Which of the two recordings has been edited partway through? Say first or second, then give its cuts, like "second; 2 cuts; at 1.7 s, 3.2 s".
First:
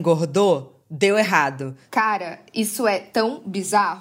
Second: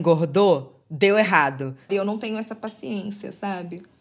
second; 1 cut; at 1.9 s